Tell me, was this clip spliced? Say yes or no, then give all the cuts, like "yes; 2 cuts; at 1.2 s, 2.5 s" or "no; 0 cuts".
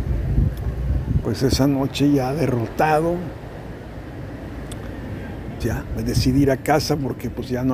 yes; 2 cuts; at 1.2 s, 5.6 s